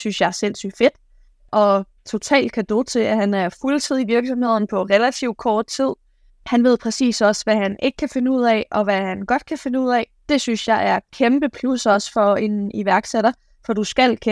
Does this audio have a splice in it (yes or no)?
no